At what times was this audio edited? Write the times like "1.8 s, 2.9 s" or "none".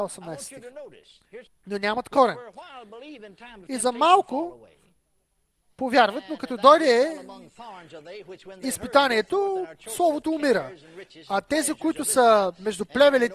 1.5 s